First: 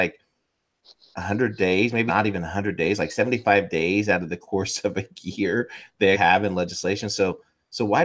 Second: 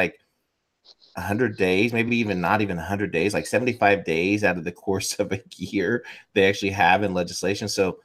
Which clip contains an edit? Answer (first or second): first